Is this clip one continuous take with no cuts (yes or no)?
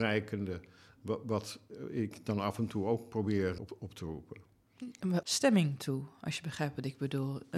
no